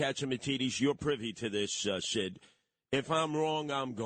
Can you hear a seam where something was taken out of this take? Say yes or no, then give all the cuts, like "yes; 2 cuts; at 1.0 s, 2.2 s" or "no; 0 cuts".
no; 0 cuts